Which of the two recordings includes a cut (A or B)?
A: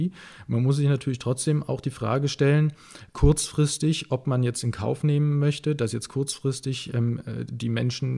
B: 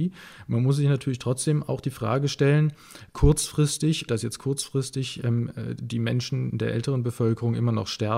B